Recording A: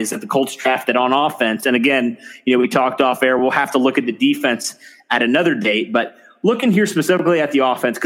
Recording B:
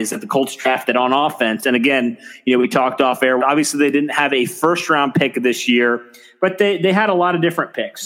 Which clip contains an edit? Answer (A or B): B